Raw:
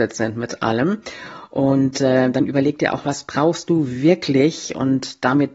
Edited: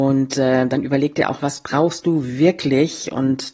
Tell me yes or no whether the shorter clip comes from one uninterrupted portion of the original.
yes